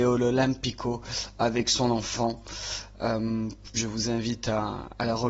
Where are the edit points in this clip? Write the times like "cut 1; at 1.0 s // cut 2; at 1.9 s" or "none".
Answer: cut 1; at 3.7 s